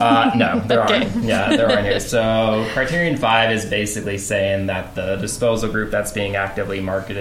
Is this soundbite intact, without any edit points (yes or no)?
yes